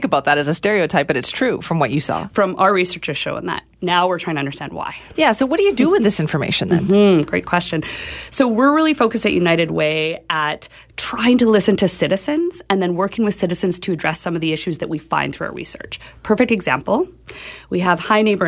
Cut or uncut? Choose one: uncut